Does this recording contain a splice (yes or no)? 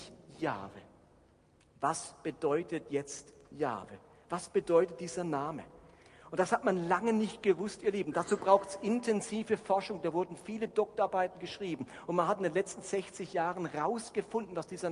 no